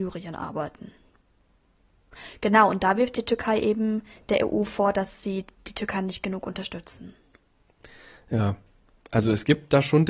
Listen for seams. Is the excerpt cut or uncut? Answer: uncut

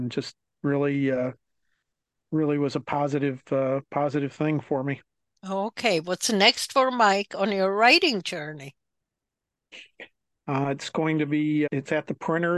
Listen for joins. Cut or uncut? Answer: cut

